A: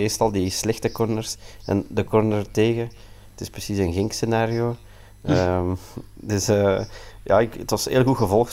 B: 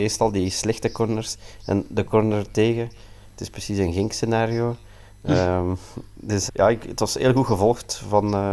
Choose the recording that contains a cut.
B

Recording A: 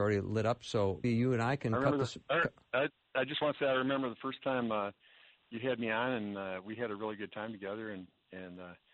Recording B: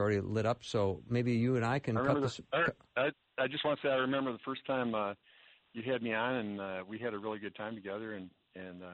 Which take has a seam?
A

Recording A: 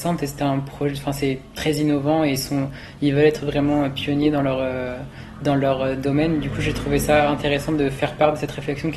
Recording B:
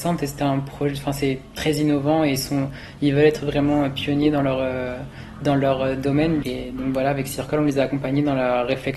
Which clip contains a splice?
B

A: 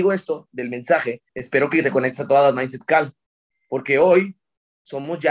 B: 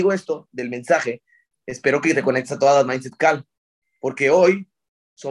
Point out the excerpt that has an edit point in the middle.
A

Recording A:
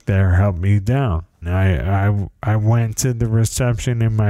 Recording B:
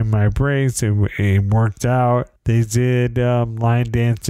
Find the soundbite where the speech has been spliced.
A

